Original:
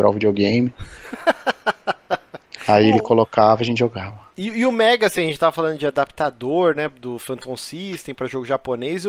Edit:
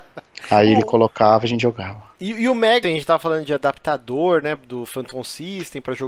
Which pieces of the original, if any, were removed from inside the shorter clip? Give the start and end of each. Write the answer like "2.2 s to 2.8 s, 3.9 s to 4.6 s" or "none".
5.0 s to 5.2 s